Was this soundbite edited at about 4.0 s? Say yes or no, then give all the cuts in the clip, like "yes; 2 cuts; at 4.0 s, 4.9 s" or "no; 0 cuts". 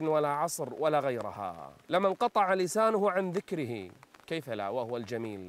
no; 1 cut; at 1.8 s